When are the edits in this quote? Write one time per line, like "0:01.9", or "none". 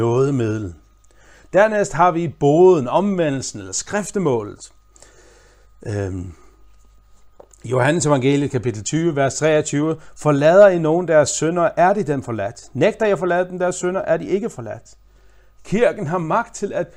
none